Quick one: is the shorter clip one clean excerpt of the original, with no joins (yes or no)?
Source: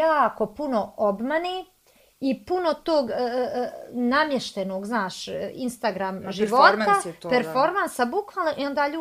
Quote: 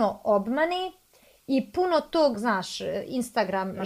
no